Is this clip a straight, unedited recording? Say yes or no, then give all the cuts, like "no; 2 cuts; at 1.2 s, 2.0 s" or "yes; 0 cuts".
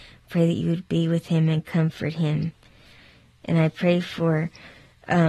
yes; 0 cuts